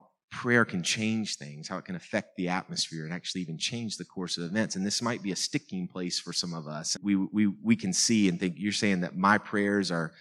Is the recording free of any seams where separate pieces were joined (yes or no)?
no